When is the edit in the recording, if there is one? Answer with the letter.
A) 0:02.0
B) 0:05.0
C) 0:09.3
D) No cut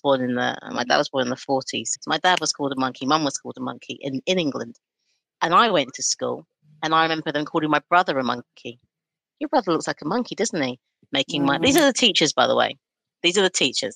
A